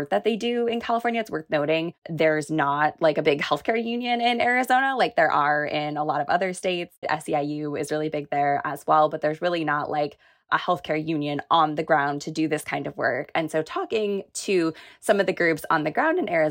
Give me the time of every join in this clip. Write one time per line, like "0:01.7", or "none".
0:07.0